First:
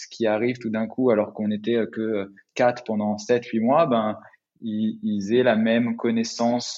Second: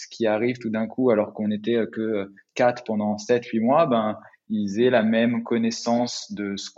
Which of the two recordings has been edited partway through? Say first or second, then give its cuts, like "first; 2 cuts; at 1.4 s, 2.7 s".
second; 1 cut; at 4.5 s